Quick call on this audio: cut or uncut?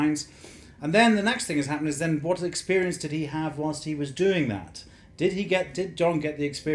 uncut